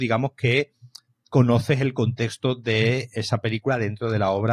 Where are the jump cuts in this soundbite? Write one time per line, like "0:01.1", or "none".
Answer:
none